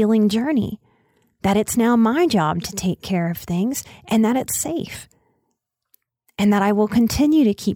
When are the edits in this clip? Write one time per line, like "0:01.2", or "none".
none